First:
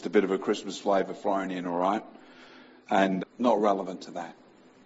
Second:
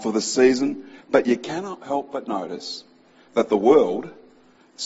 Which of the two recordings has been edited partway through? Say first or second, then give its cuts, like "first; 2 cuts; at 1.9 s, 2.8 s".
first; 1 cut; at 3.2 s